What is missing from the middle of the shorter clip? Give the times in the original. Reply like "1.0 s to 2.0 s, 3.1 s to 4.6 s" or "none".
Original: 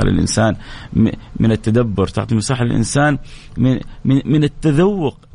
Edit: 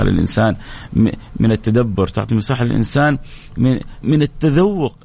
4.0 s to 4.2 s